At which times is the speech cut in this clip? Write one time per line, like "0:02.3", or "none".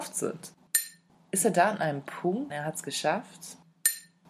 0:02.5